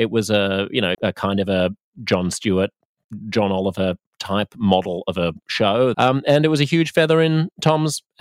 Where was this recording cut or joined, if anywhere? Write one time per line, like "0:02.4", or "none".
0:00.9
0:05.9